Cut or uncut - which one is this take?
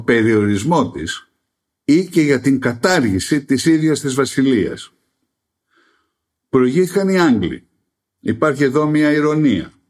uncut